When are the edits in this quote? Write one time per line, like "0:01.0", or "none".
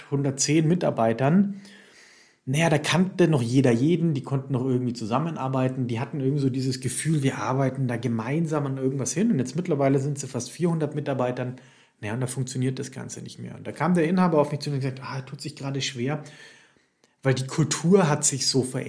none